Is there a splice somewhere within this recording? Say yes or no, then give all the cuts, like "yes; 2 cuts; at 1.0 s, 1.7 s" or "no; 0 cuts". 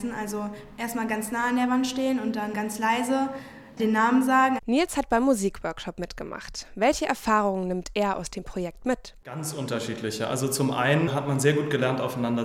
yes; 1 cut; at 4.6 s